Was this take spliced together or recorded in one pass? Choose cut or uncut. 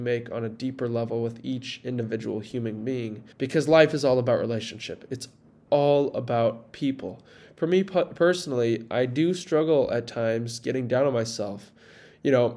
cut